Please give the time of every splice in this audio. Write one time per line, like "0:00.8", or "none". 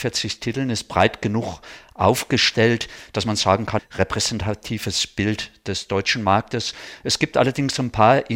0:03.8